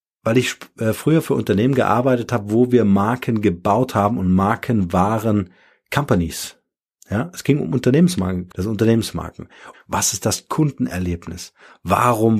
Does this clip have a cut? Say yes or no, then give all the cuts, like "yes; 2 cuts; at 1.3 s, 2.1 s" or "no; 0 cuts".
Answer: yes; 2 cuts; at 8.5 s, 9.7 s